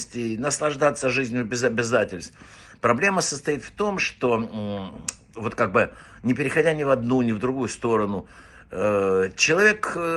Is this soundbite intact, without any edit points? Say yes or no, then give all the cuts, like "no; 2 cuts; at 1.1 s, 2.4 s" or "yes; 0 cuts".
yes; 0 cuts